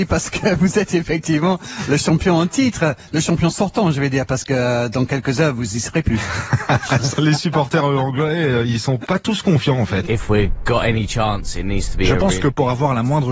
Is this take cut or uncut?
cut